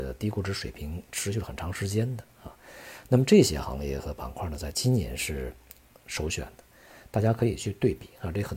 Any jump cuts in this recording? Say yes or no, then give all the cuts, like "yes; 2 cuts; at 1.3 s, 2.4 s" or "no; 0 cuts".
no; 0 cuts